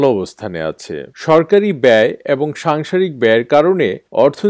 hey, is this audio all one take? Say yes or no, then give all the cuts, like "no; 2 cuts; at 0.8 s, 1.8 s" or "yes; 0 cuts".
no; 1 cut; at 1.1 s